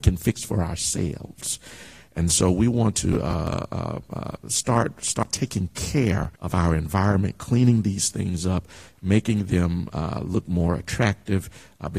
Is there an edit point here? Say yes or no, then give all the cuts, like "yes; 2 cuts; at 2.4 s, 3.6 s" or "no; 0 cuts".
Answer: yes; 1 cut; at 6.4 s